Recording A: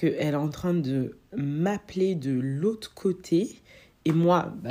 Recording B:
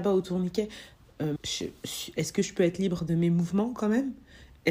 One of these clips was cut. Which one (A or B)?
B